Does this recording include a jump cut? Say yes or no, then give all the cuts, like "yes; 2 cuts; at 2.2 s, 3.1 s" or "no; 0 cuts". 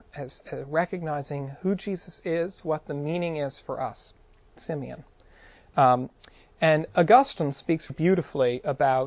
yes; 2 cuts; at 4.5 s, 7.9 s